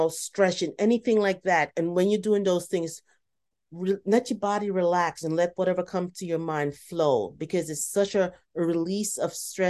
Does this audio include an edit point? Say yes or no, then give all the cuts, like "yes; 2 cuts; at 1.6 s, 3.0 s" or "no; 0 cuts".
no; 0 cuts